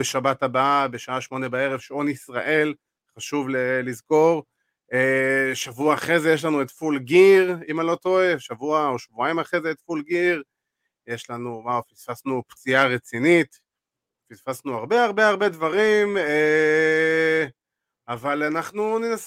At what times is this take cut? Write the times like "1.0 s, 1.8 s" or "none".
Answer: none